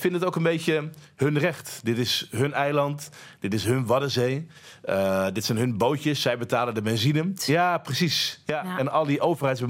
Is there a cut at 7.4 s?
yes; 1 cut; at 7.4 s

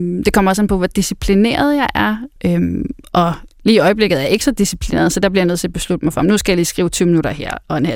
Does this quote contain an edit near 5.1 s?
no; 1 cut; at 2.4 s

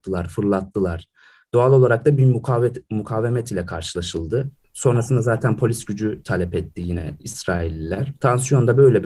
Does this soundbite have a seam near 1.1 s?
no; 0 cuts

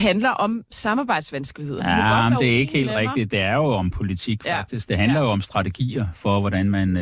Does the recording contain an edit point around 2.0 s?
no; 0 cuts

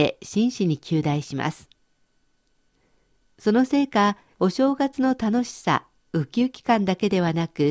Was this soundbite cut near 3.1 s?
no; 1 cut; at 4.3 s

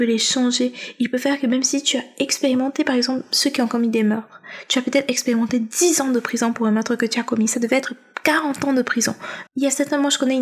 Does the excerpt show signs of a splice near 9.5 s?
yes; 1 cut; at 9.5 s

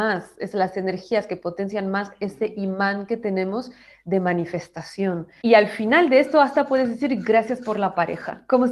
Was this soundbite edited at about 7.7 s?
no; 1 cut; at 5.4 s

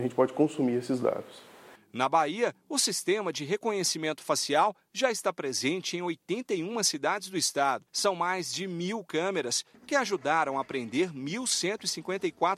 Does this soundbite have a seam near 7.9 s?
yes; 1 cut; at 7.9 s

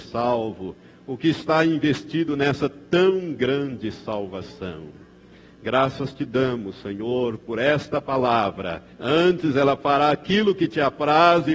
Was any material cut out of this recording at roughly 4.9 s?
no; 1 cut; at 8.9 s

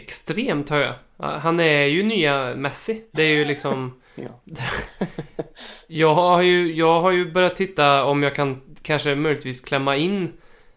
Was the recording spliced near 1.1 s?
no; 0 cuts

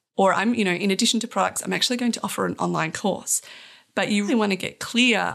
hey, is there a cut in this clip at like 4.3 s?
yes; 1 cut; at 4.3 s

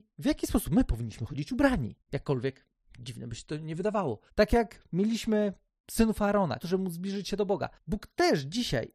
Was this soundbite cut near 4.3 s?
yes; 2 cuts; at 4.3 s, 6.6 s

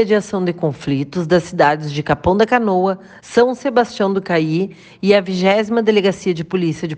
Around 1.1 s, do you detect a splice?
no; 1 cut; at 3.2 s

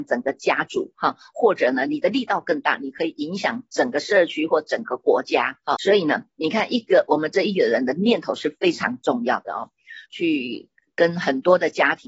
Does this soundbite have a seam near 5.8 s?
yes; 2 cuts; at 5.8 s, 10.1 s

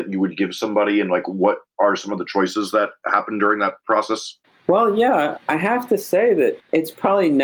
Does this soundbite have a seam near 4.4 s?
no; 0 cuts

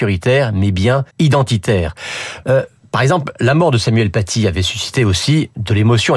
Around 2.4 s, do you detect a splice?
yes; 2 cuts; at 1.1 s, 2.4 s

